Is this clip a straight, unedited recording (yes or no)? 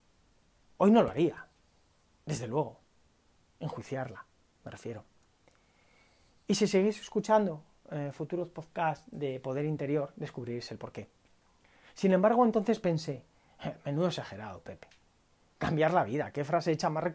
yes